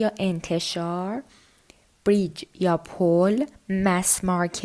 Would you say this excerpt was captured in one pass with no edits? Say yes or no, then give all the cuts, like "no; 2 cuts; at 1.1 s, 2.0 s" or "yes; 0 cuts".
yes; 0 cuts